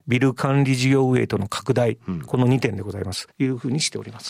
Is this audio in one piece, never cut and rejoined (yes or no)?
no